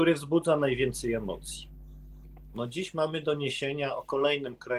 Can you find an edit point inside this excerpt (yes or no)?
yes